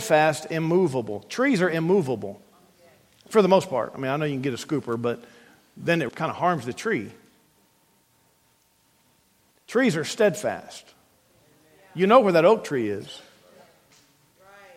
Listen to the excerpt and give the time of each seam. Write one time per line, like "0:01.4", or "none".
0:06.1